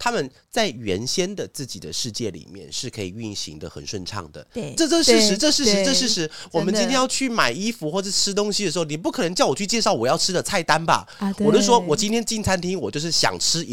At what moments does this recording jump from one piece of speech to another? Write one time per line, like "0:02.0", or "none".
0:04.8